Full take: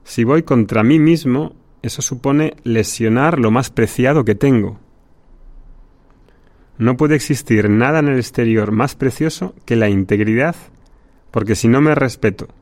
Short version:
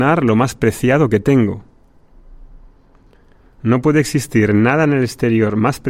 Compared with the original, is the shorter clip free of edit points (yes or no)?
yes